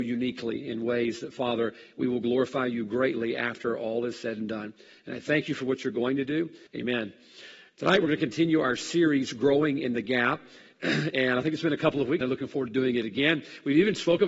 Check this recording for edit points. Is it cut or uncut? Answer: cut